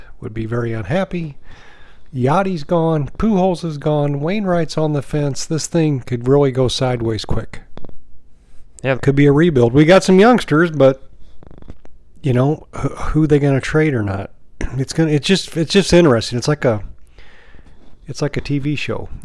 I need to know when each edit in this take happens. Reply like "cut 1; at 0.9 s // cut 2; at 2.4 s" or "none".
cut 1; at 9.0 s